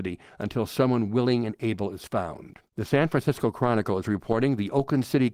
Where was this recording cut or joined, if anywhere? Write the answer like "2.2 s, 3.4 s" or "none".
2.7 s